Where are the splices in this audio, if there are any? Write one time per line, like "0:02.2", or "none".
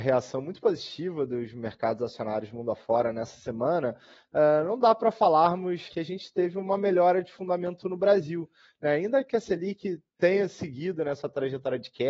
0:05.9
0:10.1